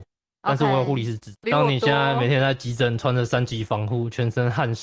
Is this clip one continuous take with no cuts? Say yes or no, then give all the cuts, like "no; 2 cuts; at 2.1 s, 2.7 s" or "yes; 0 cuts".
no; 1 cut; at 1.4 s